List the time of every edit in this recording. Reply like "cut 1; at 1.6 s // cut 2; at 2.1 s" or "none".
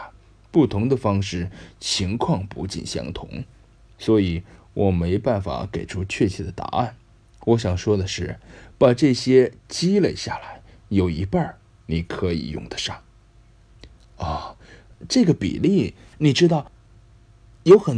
cut 1; at 16.1 s

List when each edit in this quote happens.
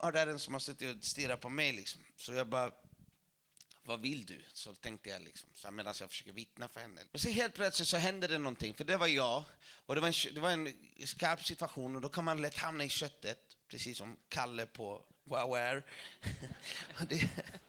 cut 1; at 7.1 s

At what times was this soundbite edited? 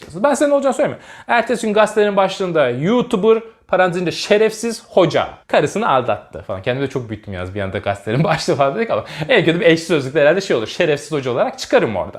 cut 1; at 5.4 s

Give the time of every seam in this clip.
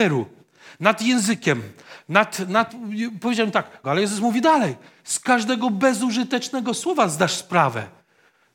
cut 1; at 2.7 s // cut 2; at 3.8 s

